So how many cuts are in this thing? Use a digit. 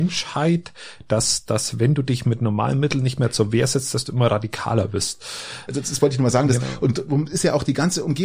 1